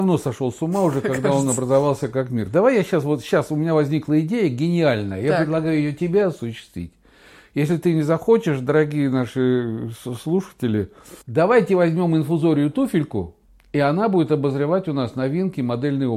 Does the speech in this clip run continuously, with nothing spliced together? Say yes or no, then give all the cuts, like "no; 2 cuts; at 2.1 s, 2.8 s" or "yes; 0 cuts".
yes; 0 cuts